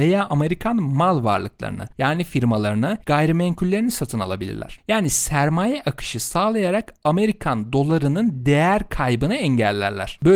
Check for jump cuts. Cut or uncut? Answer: cut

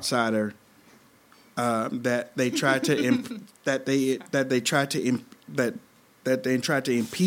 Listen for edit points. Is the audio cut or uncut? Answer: uncut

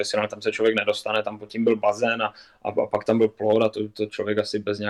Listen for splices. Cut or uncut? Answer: uncut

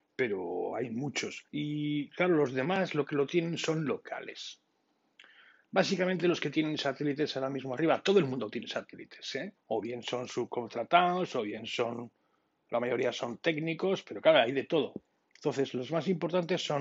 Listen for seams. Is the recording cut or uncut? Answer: cut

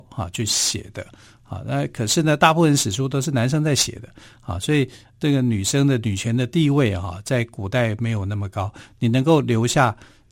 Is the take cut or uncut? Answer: uncut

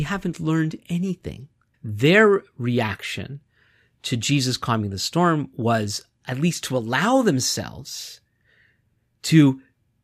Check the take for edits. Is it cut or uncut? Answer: cut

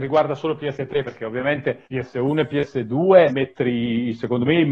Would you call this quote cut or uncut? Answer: cut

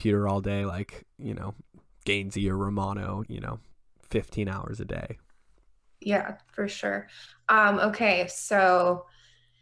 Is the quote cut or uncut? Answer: cut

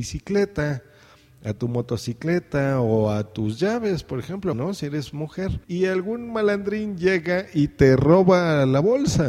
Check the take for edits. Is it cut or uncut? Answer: cut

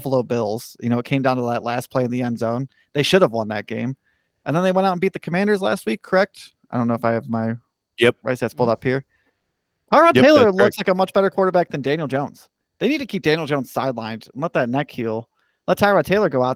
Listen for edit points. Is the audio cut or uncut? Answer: uncut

